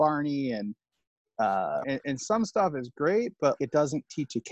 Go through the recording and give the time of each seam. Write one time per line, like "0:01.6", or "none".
0:01.8
0:03.6